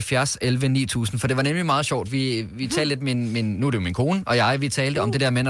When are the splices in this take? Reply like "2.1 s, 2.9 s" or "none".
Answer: none